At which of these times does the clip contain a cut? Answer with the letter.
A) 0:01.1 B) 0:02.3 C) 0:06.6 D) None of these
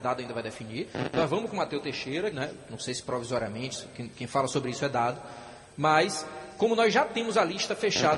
B